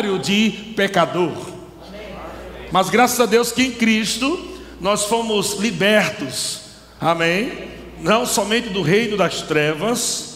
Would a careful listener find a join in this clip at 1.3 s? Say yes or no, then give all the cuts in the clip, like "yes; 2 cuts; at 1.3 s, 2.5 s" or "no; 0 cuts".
no; 1 cut; at 2.7 s